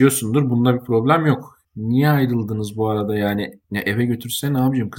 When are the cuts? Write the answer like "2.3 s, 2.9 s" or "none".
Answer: 1.6 s, 3.6 s

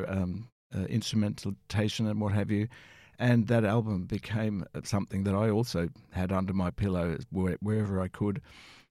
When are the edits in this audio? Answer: none

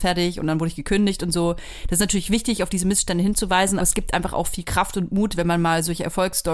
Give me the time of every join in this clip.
3.8 s

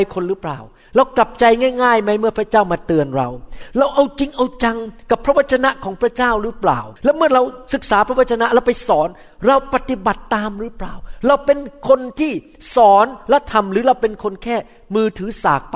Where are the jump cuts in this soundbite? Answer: 7.0 s

